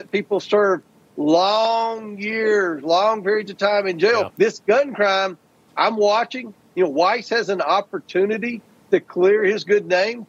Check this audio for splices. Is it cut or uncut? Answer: cut